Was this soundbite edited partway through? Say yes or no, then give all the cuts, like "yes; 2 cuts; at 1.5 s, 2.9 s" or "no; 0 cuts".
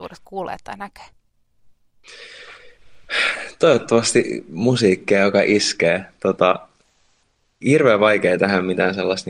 no; 0 cuts